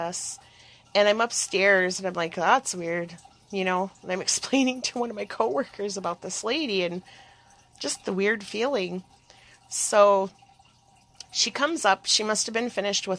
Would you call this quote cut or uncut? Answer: uncut